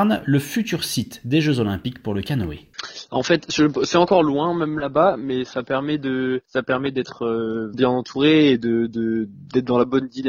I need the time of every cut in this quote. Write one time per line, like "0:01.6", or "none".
0:06.4
0:07.7